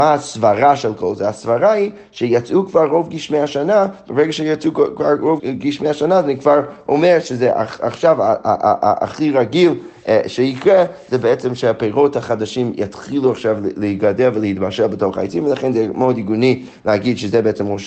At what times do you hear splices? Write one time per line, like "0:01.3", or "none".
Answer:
0:05.4